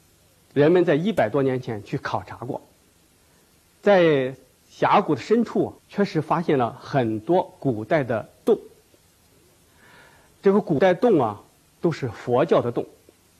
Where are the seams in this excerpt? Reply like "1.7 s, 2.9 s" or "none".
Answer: 5.8 s, 11.8 s